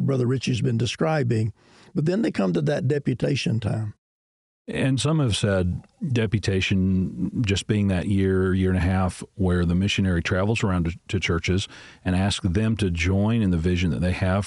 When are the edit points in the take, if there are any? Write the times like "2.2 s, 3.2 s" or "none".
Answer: none